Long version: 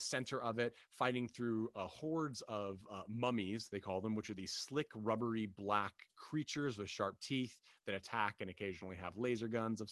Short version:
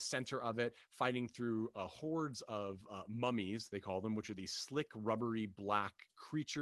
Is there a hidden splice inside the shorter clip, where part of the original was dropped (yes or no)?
no